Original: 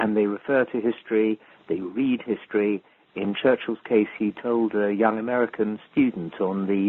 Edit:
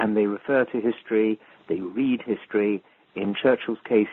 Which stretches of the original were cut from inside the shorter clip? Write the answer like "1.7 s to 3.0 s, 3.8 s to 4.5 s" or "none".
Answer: none